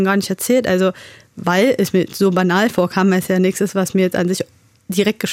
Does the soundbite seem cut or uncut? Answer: uncut